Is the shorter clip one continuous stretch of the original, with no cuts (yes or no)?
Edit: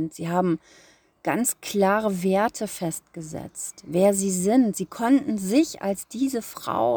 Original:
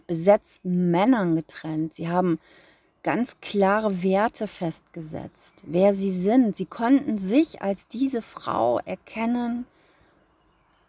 yes